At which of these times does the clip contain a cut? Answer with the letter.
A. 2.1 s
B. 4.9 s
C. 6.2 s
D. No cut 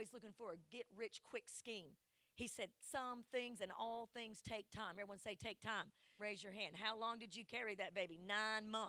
C